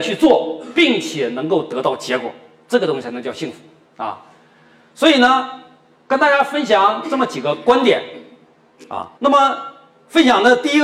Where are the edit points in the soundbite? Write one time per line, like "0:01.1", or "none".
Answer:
0:09.2